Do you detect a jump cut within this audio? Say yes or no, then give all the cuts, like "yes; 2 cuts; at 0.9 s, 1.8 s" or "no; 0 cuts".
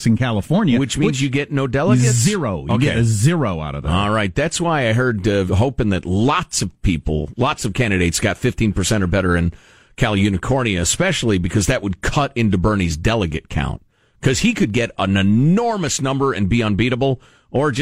yes; 1 cut; at 5.5 s